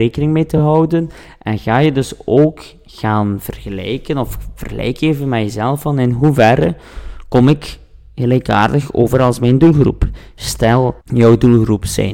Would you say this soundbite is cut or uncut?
cut